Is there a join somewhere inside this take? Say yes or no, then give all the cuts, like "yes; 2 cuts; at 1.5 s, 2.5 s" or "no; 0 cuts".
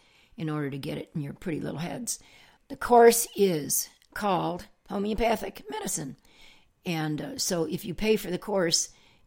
yes; 2 cuts; at 2.6 s, 6.7 s